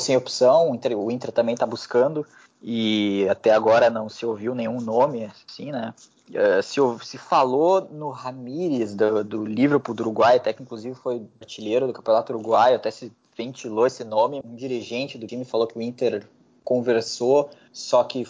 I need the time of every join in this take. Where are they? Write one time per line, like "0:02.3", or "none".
0:14.4